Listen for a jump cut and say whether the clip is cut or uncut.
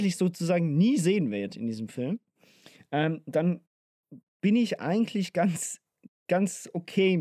uncut